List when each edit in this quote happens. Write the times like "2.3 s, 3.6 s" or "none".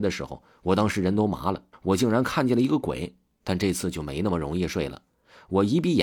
1.7 s, 3.4 s